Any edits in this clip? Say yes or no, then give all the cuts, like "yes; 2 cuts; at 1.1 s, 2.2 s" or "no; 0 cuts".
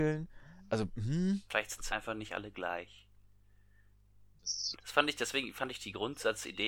yes; 2 cuts; at 1.9 s, 4.7 s